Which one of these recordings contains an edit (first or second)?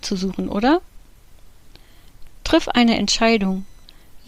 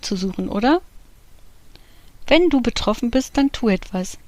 first